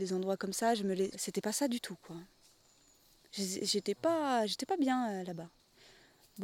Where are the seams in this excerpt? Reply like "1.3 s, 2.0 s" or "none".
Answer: 1.1 s